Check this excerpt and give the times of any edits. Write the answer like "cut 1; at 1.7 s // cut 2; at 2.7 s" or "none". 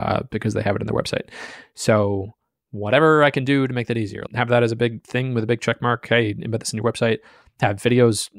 cut 1; at 4.3 s